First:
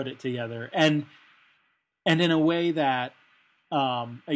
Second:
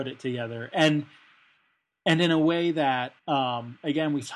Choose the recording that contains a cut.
second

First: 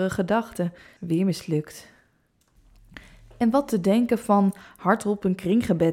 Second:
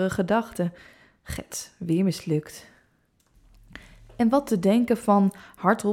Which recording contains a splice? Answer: first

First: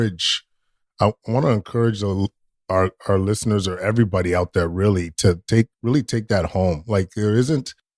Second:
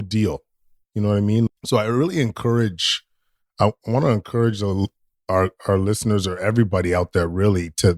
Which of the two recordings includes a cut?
second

